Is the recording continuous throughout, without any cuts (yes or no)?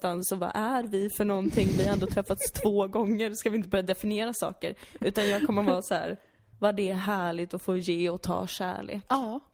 no